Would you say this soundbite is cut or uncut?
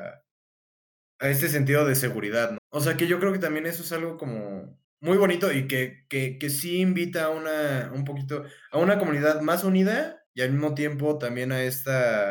cut